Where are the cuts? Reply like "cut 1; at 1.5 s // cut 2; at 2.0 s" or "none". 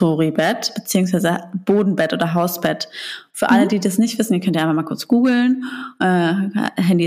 none